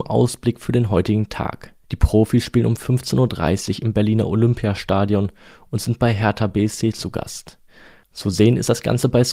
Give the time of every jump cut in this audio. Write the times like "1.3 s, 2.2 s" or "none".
1.8 s